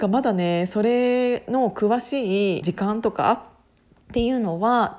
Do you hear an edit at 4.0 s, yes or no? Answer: no